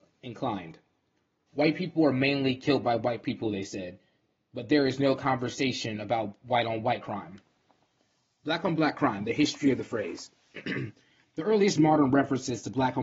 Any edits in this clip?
yes; 1 cut; at 1.5 s

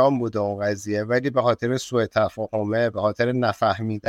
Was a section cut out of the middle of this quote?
no; 0 cuts

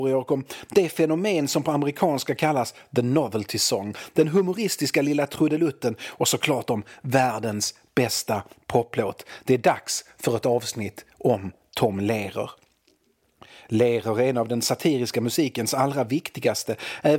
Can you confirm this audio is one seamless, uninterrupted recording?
yes; 0 cuts

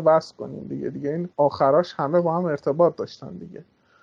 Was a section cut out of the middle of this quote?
yes; 1 cut; at 1.3 s

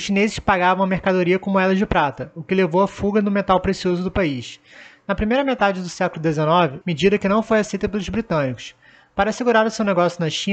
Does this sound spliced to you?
yes; 1 cut; at 6.8 s

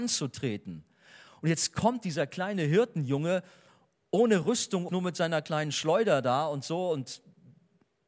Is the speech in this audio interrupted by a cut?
yes; 1 cut; at 4.9 s

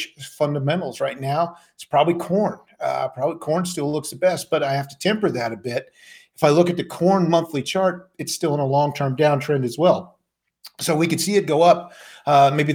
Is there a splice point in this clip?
no; 0 cuts

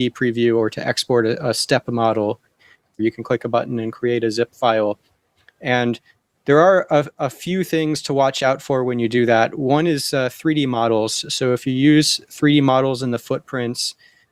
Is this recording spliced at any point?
yes; 1 cut; at 3.0 s

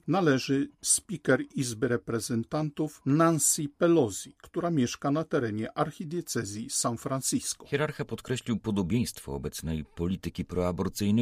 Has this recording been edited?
no; 0 cuts

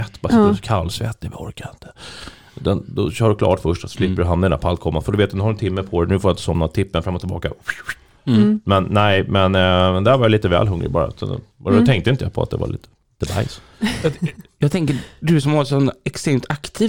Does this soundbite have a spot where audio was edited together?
no; 0 cuts

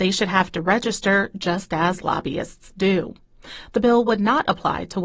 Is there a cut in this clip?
no; 0 cuts

